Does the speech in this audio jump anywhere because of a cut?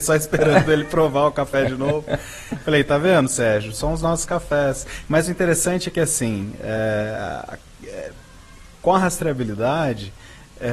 no; 0 cuts

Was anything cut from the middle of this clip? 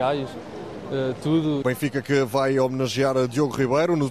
yes; 1 cut; at 1.6 s

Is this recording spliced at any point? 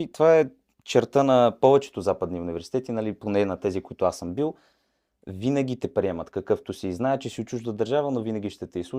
no; 0 cuts

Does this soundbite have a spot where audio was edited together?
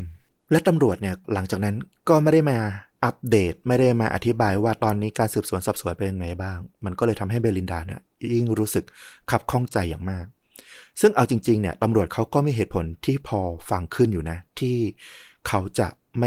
yes; 1 cut; at 14.5 s

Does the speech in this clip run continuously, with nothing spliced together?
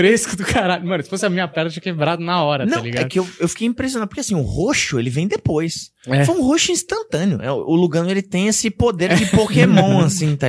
yes; 0 cuts

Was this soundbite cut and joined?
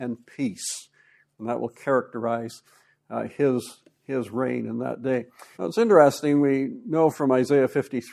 yes; 1 cut; at 5.5 s

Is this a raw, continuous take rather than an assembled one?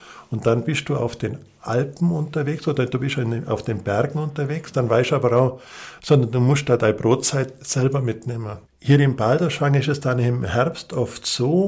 no; 2 cuts; at 6.0 s, 8.6 s

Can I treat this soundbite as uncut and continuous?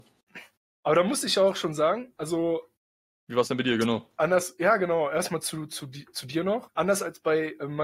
yes; 0 cuts

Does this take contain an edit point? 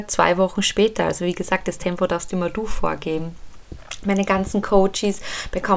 no; 0 cuts

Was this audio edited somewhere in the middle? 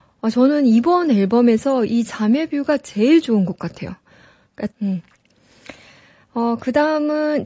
yes; 1 cut; at 4.7 s

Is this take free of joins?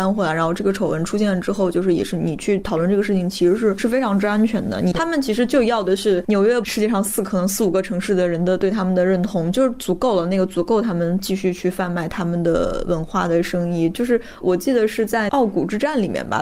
no; 2 cuts; at 6.6 s, 14.4 s

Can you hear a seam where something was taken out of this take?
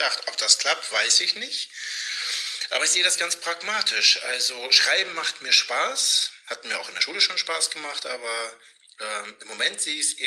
no; 0 cuts

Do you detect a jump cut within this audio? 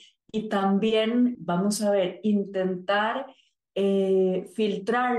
yes; 1 cut; at 1.3 s

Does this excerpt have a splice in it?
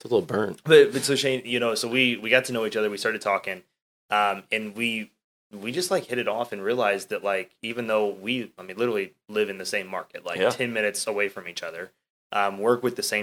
no; 0 cuts

